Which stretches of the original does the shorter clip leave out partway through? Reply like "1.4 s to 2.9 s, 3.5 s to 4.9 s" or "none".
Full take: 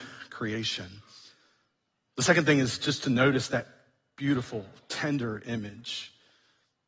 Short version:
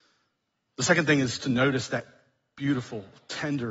2.8 s to 3.0 s